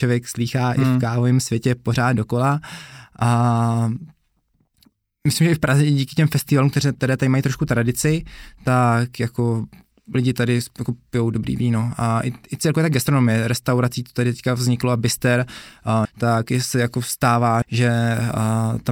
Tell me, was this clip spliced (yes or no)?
yes